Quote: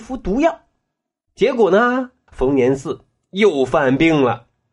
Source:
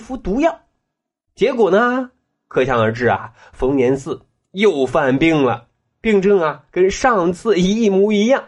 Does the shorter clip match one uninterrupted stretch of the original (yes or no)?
no